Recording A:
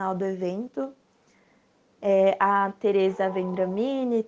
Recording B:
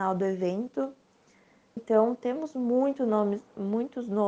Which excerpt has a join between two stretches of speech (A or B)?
B